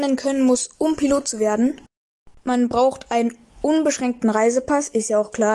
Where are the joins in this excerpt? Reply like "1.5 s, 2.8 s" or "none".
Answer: 2.3 s